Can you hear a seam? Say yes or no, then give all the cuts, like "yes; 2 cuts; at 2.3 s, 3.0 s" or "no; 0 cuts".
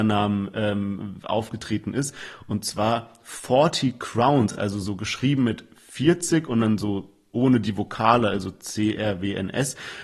no; 0 cuts